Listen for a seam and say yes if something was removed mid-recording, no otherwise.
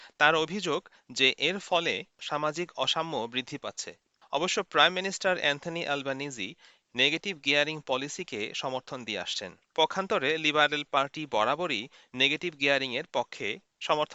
no